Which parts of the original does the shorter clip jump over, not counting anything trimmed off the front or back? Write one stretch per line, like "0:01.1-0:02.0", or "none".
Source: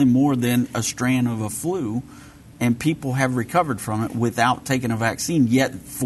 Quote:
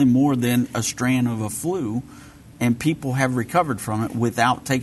none